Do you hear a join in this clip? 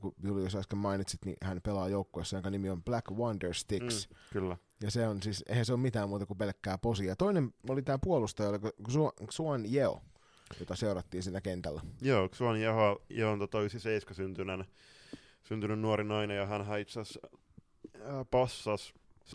no; 0 cuts

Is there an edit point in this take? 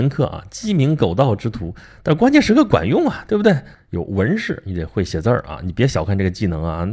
yes; 1 cut; at 3.7 s

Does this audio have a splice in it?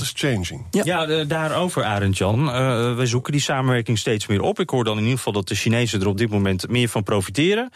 no; 0 cuts

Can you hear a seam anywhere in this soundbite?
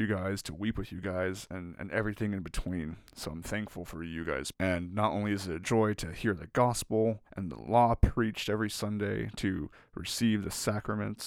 yes; 2 cuts; at 4.5 s, 7.3 s

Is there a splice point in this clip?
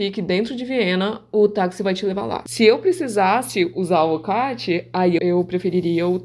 yes; 2 cuts; at 2.5 s, 5.2 s

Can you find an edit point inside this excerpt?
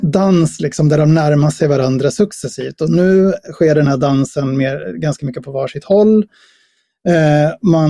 no; 0 cuts

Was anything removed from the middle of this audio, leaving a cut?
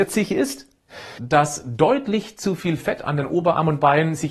yes; 1 cut; at 1.2 s

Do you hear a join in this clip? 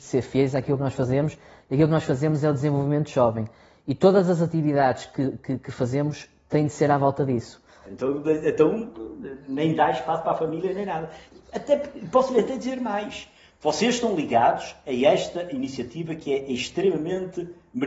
yes; 1 cut; at 7.8 s

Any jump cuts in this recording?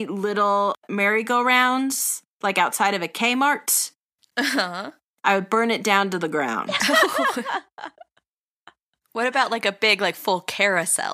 no; 0 cuts

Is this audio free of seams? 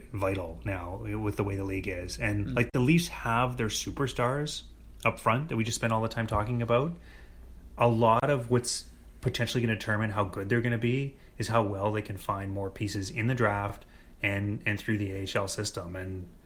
yes; 0 cuts

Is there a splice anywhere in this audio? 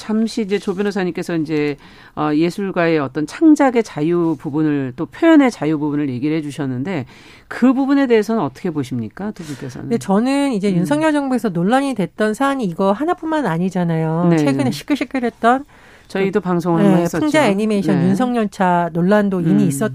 no; 0 cuts

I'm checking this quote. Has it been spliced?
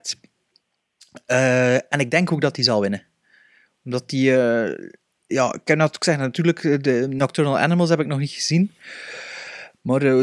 no; 0 cuts

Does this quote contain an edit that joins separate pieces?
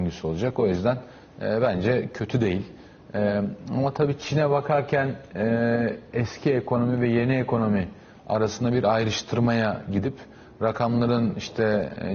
no; 0 cuts

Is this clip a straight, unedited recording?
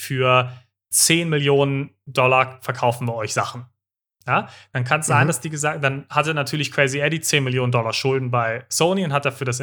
yes; 0 cuts

